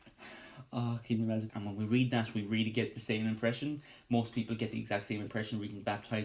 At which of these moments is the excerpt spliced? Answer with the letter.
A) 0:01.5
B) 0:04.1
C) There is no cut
A